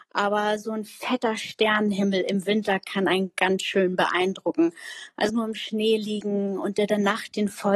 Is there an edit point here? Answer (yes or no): yes